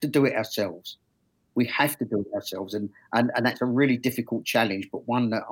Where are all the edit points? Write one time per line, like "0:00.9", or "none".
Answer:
none